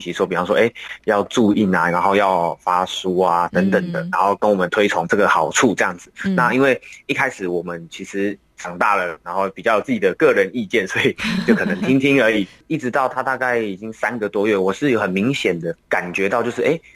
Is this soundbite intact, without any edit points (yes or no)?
yes